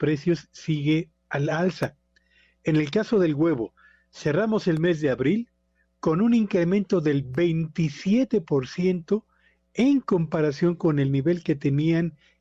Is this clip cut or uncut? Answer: uncut